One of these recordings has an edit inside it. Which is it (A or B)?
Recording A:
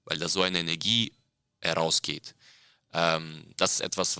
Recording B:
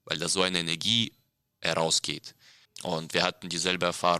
B